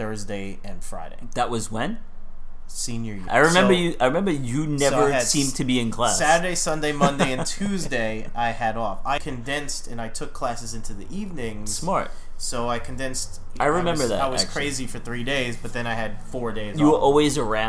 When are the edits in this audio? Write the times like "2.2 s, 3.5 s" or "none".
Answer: 3.3 s, 9.2 s, 13.6 s